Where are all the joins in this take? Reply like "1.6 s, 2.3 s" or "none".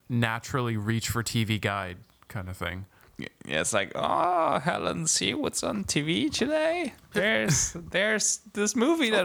none